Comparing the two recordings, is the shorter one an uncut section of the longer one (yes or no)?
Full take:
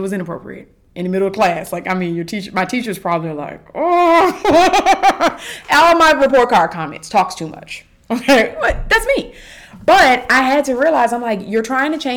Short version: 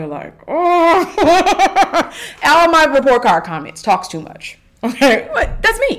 yes